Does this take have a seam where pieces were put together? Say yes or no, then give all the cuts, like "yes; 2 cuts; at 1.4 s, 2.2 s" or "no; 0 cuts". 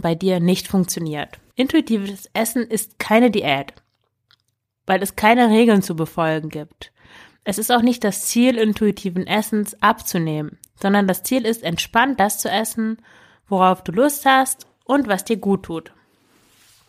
yes; 1 cut; at 1.5 s